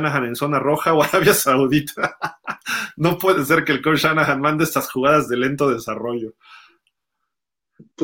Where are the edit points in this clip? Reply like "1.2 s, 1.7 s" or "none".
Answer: none